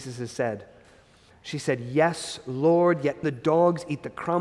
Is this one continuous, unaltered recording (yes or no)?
no